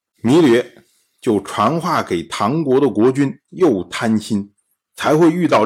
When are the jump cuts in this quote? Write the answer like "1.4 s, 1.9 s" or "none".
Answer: 3.5 s